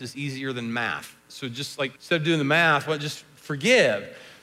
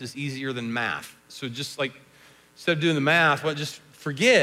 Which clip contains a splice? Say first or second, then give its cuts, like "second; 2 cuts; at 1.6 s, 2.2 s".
first; 1 cut; at 2.0 s